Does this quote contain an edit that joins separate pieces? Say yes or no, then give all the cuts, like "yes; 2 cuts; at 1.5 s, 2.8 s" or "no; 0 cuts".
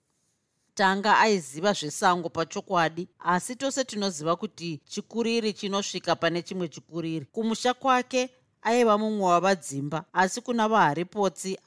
yes; 2 cuts; at 7.3 s, 10.1 s